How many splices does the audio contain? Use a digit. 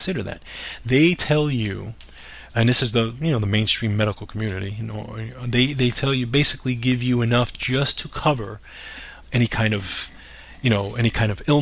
1